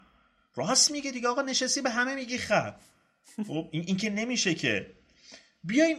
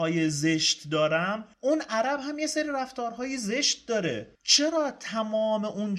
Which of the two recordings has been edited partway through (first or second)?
second